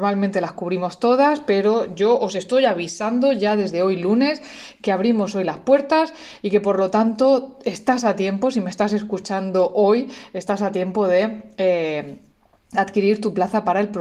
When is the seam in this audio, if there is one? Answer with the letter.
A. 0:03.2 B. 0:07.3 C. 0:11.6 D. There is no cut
D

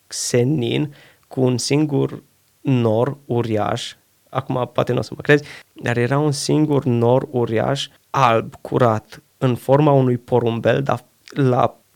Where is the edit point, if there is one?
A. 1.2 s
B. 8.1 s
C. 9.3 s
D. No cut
C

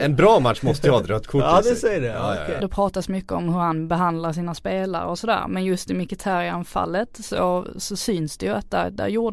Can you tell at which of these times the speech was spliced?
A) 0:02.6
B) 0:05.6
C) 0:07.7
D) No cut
A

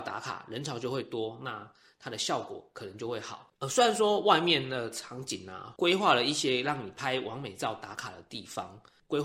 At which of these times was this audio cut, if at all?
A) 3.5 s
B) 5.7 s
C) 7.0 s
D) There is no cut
A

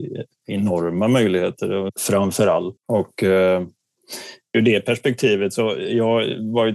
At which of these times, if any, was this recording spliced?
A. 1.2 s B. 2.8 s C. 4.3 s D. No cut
B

